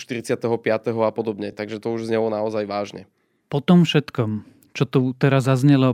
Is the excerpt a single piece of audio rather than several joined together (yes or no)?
yes